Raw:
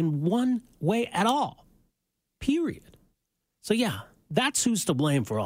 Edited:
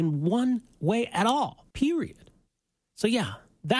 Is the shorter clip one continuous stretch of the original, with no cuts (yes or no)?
no